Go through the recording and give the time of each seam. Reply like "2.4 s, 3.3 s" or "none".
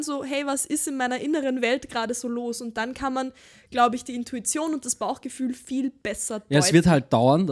none